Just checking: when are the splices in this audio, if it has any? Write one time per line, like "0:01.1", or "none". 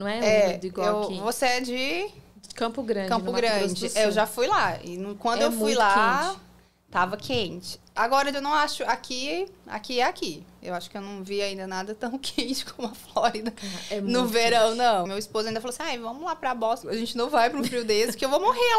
0:08.3
0:15.1
0:16.8